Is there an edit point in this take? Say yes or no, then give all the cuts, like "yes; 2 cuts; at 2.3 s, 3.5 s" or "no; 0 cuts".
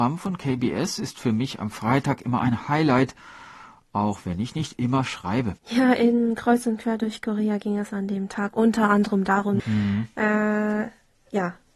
yes; 2 cuts; at 5.6 s, 9.6 s